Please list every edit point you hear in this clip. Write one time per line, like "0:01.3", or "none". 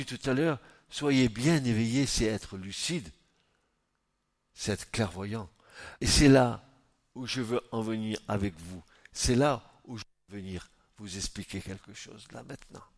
0:06.0